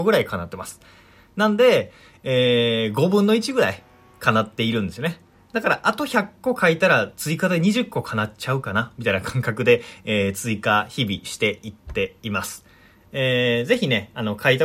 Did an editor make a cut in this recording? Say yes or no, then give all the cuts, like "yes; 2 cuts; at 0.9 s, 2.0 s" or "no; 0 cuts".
no; 0 cuts